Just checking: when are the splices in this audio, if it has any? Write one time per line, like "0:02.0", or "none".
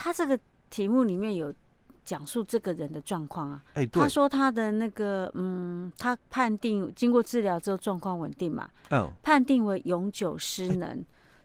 0:03.7
0:06.2